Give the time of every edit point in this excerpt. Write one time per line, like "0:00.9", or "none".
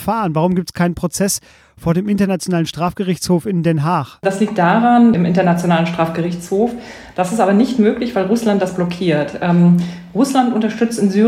0:05.1
0:07.1